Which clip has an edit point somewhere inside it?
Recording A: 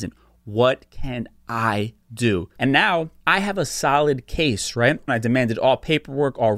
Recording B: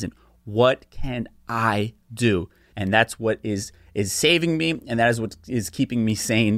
A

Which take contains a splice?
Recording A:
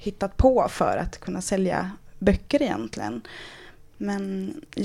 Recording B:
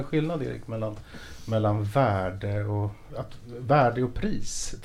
B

